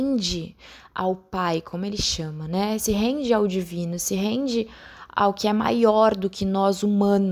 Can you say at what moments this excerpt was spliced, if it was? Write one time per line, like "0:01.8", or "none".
none